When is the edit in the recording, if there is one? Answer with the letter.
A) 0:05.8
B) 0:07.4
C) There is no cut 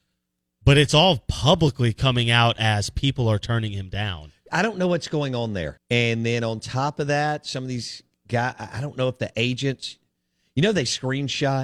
A